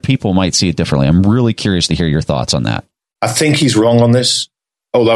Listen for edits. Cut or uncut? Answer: cut